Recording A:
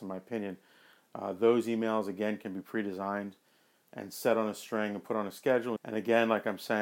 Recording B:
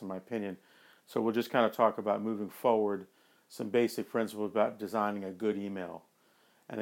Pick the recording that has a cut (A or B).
A